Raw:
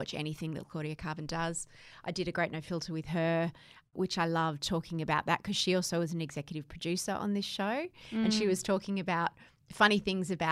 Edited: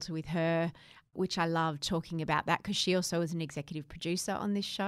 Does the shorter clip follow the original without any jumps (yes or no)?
yes